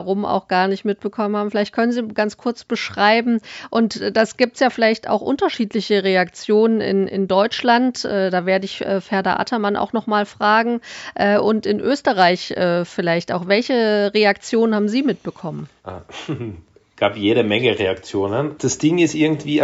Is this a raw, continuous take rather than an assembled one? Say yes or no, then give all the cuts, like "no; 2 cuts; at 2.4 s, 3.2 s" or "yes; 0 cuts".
no; 2 cuts; at 15.8 s, 18.6 s